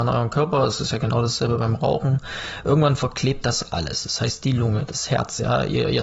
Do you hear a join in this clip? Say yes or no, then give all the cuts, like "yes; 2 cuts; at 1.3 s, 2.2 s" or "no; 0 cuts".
no; 0 cuts